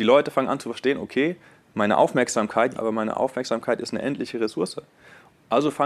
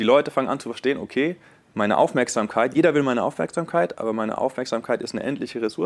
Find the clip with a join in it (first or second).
first